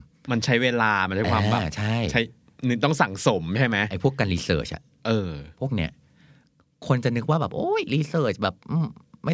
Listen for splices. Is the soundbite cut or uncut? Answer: uncut